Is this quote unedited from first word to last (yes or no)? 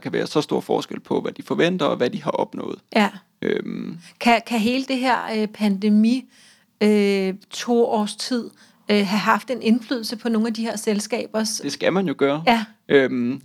no